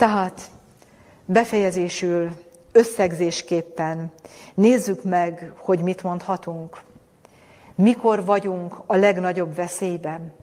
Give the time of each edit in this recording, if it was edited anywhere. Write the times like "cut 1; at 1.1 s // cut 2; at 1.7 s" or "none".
none